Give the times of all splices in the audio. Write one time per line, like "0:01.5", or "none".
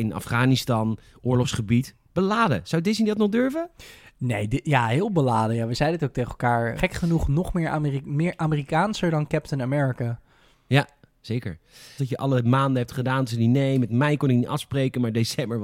0:06.8
0:12.0